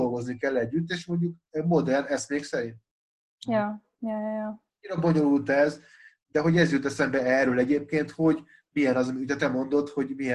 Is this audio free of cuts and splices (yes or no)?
yes